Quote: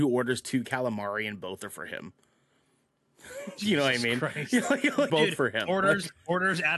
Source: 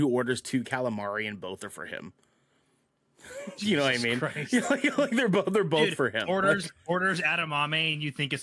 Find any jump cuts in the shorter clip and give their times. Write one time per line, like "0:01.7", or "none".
0:05.1